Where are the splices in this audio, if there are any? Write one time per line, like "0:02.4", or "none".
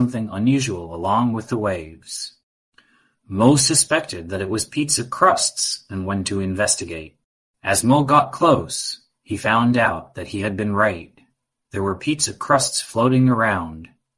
none

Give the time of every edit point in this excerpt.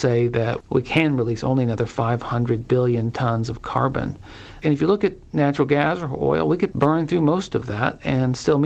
0:06.7

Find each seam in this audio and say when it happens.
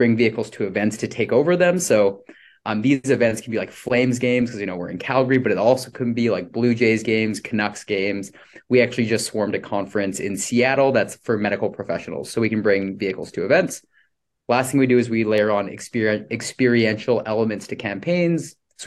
none

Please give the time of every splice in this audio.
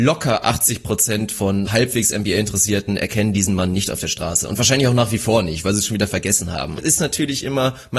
0:01.7
0:06.8

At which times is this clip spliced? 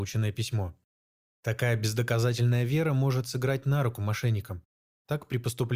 0:01.3

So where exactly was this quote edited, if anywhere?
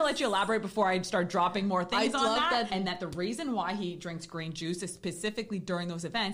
0:02.7

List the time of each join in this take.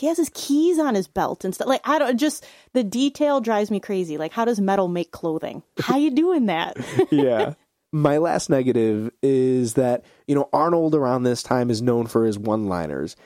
0:05.8

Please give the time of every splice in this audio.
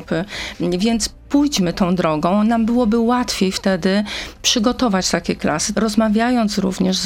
0:05.7

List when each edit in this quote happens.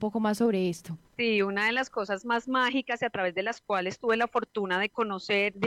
0:01.1

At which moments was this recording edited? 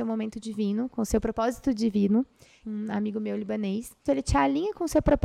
0:02.6
0:04.1

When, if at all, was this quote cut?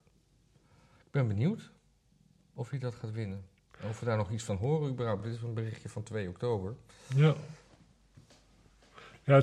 none

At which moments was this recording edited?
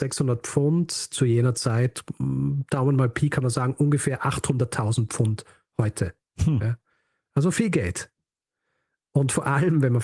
none

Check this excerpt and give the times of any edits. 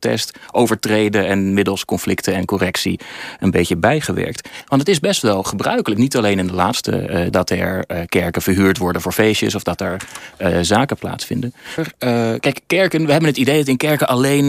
0:04.6
0:07.3
0:11.8

